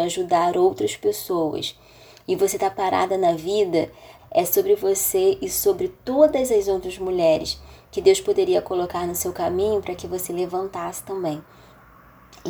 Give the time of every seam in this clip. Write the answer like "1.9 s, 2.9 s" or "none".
4.2 s